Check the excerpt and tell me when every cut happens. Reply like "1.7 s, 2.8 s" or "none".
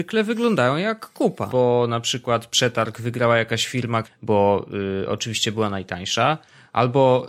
1.5 s, 4.0 s